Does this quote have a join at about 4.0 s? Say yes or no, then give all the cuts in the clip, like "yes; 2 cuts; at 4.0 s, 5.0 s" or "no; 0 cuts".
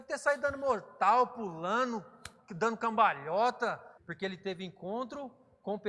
yes; 1 cut; at 4.0 s